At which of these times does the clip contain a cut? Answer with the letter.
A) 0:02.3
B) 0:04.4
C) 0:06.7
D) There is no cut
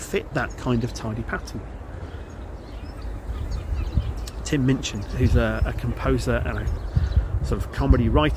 D